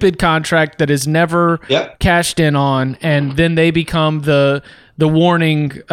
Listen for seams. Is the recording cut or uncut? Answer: uncut